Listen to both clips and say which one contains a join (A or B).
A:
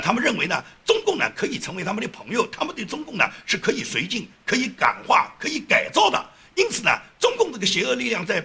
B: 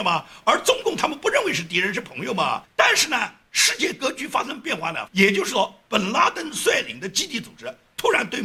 B